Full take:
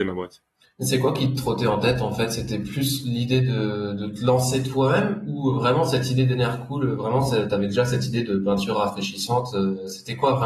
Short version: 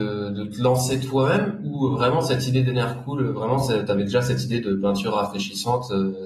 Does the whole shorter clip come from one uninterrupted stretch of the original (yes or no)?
yes